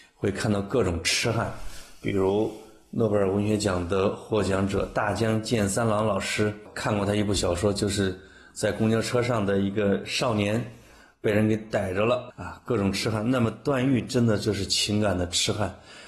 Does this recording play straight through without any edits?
no; 1 cut; at 12.3 s

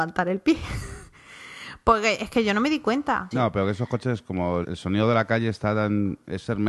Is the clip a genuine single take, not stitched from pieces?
no; 2 cuts; at 3.3 s, 4.6 s

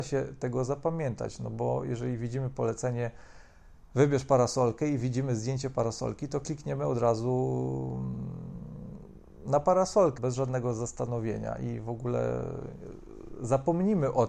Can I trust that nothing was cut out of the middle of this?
no; 1 cut; at 10.2 s

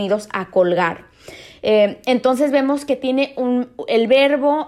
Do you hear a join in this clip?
no; 0 cuts

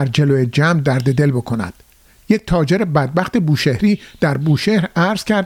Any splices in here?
no; 0 cuts

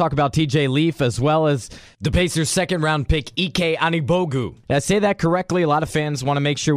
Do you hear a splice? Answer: no; 0 cuts

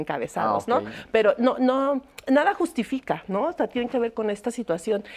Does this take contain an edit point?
no; 0 cuts

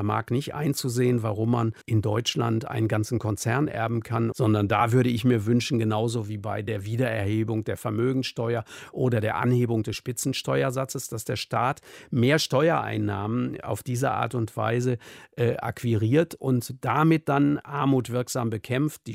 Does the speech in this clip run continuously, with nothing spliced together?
no; 2 cuts; at 1.8 s, 4.3 s

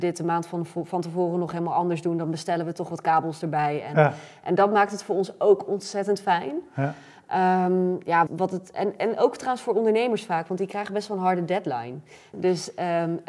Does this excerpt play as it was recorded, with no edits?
no; 2 cuts; at 8.3 s, 12.3 s

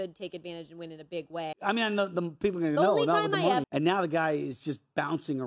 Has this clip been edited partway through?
yes; 2 cuts; at 1.5 s, 3.6 s

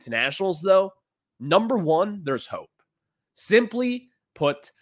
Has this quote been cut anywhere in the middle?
no; 0 cuts

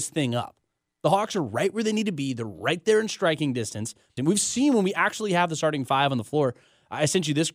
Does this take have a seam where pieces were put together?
yes; 1 cut; at 4.2 s

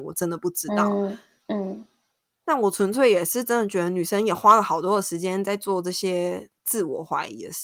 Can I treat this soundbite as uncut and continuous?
yes; 0 cuts

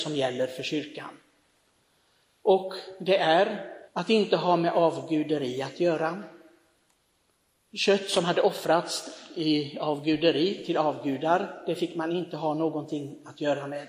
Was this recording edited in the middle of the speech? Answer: yes; 1 cut; at 3.9 s

